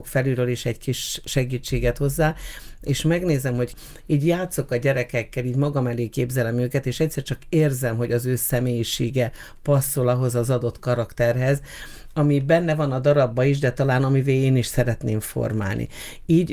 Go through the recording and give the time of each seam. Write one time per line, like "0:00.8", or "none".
none